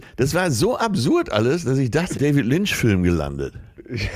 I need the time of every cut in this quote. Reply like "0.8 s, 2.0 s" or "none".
2.1 s